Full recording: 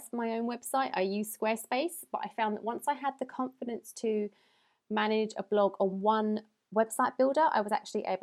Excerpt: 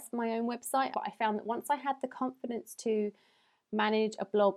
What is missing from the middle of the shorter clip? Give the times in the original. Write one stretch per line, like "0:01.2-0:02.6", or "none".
0:00.9-0:02.1